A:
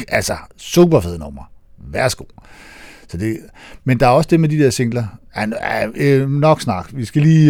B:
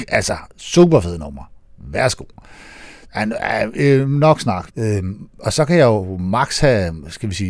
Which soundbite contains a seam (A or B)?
B